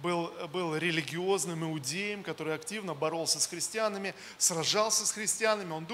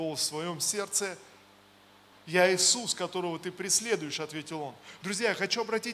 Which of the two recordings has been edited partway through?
second; 2 cuts; at 2.1 s, 5.0 s

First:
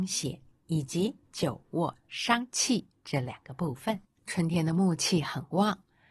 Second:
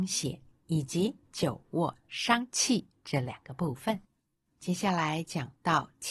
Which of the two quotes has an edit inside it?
first; 1 cut; at 4.2 s

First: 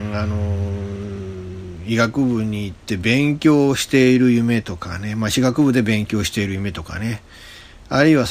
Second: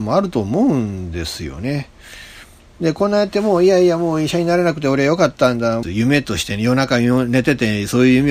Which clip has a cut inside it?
second; 2 cuts; at 2.6 s, 5.8 s

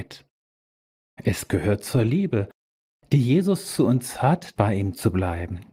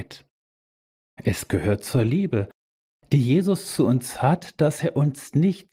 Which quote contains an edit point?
first; 1 cut; at 4.6 s

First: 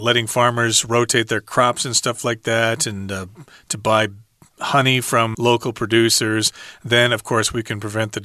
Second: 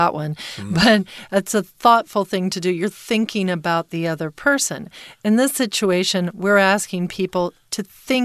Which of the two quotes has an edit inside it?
first; 1 cut; at 5.3 s

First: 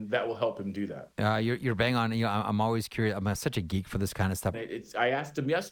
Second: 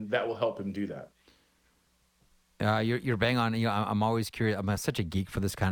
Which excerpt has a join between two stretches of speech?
first; 2 cuts; at 1.1 s, 4.5 s

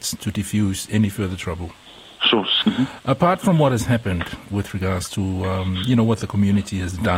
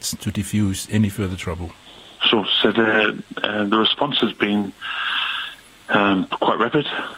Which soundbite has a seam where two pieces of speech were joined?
first; 1 cut; at 2.6 s

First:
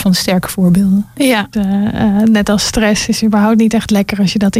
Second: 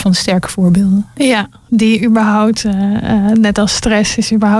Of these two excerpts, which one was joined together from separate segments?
first; 1 cut; at 1.5 s

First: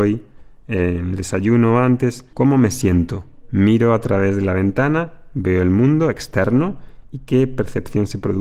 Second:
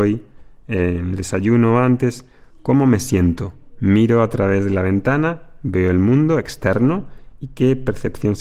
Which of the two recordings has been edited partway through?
first; 1 cut; at 2.3 s

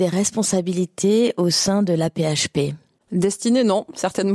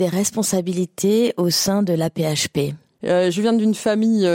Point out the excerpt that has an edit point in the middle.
second; 1 cut; at 3.0 s

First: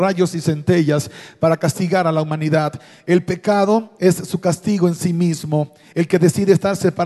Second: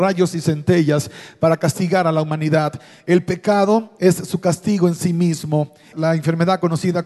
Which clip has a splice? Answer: second; 1 cut; at 5.9 s

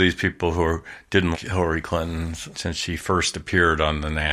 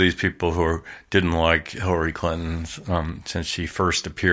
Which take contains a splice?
first; 2 cuts; at 1.3 s, 2.5 s

